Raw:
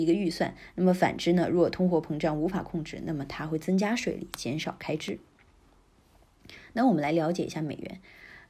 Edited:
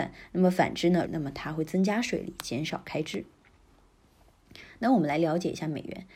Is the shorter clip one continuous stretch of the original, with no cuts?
no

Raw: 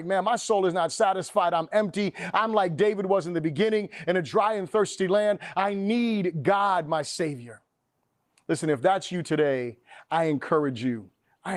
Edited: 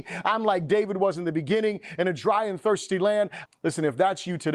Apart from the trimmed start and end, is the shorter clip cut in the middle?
yes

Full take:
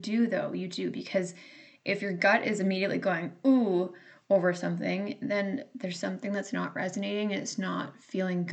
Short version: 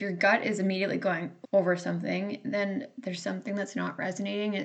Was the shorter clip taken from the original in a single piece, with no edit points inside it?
no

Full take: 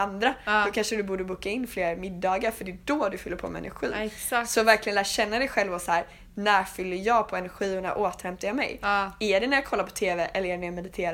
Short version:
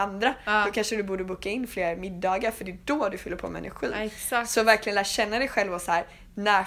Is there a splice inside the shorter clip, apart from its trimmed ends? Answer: no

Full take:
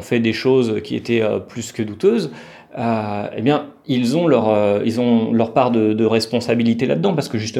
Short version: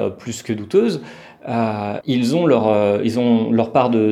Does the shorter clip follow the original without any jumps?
no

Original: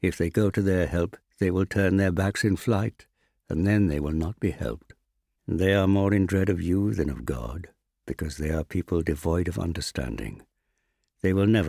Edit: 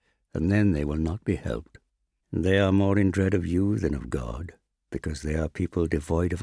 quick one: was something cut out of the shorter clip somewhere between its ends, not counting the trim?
no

